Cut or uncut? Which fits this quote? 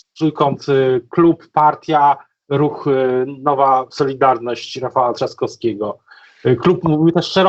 uncut